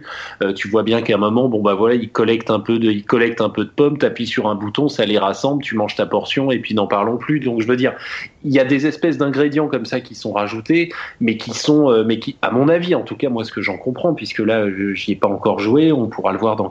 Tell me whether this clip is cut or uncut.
uncut